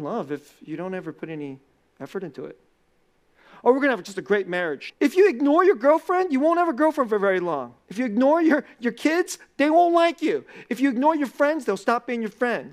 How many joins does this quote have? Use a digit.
1